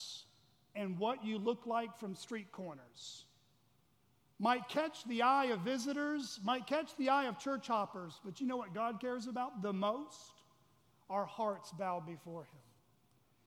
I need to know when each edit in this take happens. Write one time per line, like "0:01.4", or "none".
none